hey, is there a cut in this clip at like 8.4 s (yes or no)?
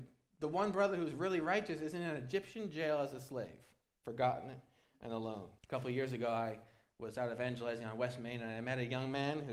no